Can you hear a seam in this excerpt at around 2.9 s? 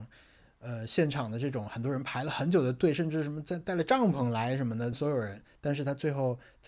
no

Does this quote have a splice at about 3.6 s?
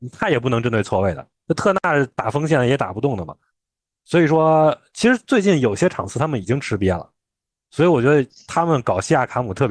no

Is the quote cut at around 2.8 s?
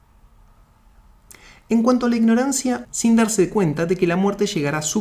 yes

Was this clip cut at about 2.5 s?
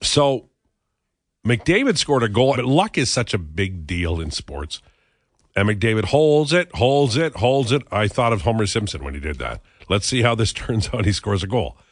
yes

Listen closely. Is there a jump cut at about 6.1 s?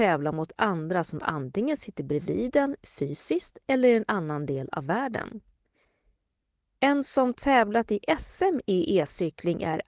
no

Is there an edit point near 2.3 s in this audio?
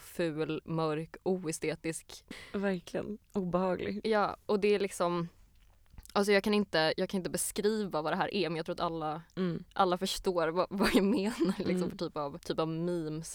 yes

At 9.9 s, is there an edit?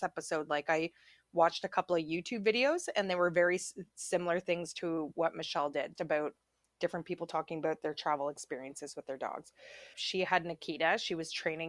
yes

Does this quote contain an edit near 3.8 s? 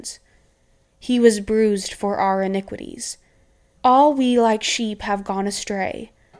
yes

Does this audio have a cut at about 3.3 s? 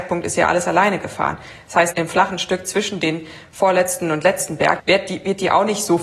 no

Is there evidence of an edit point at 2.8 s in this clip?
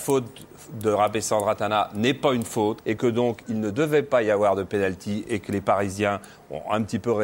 yes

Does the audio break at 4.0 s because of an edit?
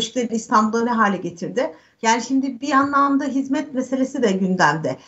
no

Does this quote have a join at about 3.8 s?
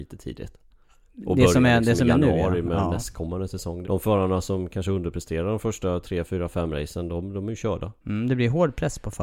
yes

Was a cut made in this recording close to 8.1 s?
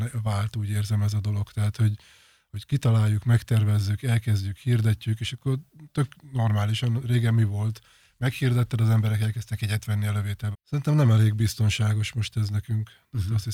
no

